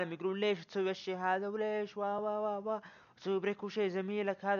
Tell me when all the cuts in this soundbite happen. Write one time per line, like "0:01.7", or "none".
none